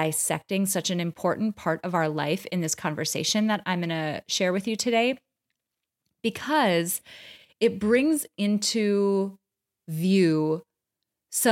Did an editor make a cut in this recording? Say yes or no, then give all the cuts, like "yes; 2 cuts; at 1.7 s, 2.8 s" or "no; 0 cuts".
no; 0 cuts